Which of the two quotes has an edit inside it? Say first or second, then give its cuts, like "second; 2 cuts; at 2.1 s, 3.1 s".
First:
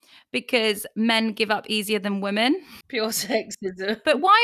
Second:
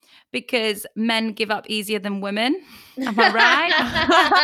first; 1 cut; at 2.8 s